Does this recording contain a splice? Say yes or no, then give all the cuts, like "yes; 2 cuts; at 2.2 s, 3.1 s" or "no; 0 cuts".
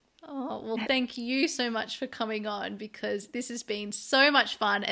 no; 0 cuts